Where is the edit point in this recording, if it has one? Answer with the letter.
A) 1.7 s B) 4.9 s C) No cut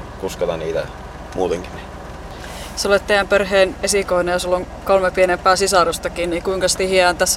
A